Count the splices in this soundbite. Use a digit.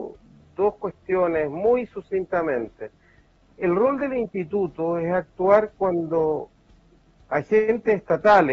0